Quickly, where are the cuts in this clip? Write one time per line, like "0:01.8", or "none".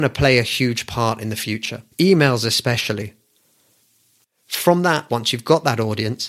0:01.9
0:05.1